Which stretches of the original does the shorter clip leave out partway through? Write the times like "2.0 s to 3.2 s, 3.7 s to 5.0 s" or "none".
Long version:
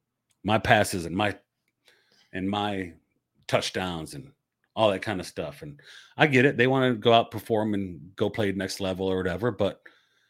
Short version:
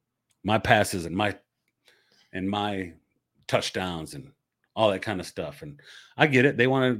none